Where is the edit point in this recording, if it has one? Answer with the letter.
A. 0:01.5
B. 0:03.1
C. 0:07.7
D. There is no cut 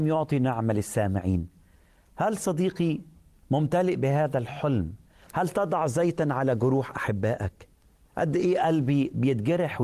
D